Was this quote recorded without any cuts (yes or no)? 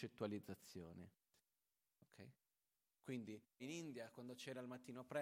no